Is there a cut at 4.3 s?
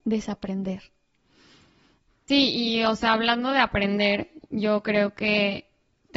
no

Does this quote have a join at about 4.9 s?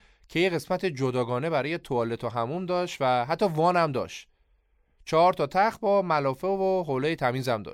no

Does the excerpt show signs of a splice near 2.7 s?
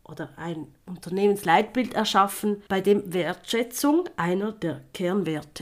yes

